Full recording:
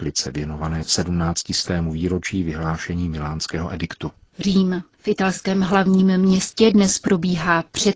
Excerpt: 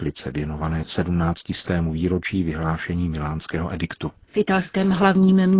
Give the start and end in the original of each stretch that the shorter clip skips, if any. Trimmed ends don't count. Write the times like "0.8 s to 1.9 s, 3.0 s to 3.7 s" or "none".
4.2 s to 4.9 s